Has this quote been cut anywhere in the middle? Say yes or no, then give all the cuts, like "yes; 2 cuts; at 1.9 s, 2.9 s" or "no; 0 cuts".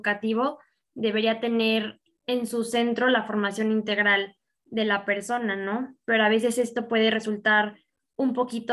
no; 0 cuts